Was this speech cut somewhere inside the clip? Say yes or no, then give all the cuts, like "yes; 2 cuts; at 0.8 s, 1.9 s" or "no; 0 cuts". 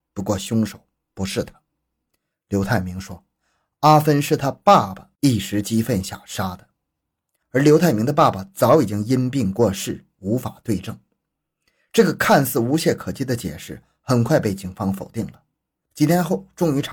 yes; 1 cut; at 15.9 s